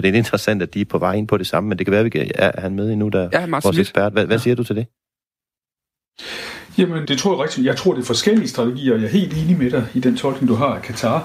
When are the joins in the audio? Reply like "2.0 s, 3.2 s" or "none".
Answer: 7.1 s